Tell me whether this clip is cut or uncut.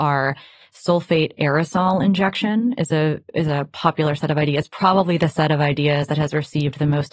uncut